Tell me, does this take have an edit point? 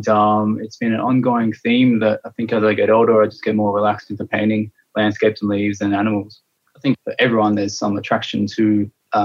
no; 0 cuts

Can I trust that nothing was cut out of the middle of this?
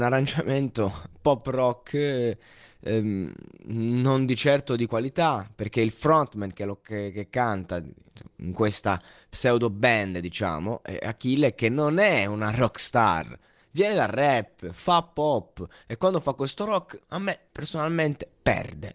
yes; 0 cuts

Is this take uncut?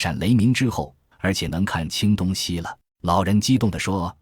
no; 2 cuts; at 1.1 s, 2.9 s

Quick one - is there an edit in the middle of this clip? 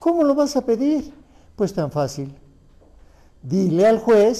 no; 0 cuts

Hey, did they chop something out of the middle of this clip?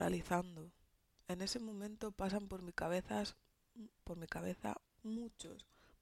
yes; 1 cut; at 4.8 s

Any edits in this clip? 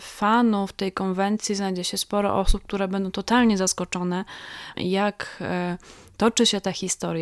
yes; 1 cut; at 4.7 s

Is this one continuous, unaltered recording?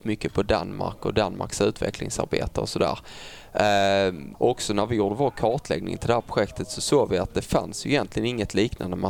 no; 1 cut; at 4.3 s

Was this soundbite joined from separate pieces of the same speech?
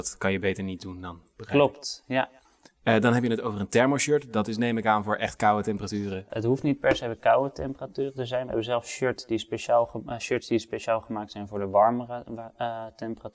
yes; 1 cut; at 6.3 s

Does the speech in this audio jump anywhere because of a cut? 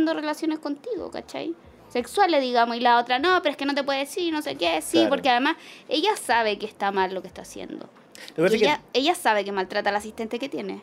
no; 0 cuts

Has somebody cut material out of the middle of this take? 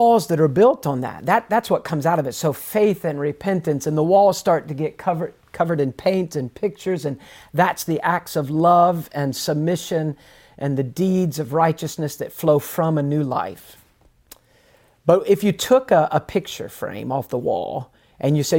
no; 0 cuts

